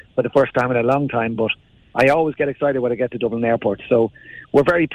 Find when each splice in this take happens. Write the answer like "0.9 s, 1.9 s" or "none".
none